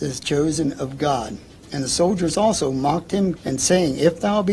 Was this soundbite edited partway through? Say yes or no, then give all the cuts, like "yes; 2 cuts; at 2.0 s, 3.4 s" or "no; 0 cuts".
yes; 1 cut; at 3.4 s